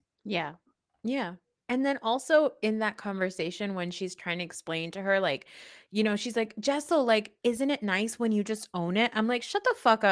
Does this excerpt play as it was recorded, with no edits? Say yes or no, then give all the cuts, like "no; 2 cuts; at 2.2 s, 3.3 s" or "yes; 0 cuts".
yes; 0 cuts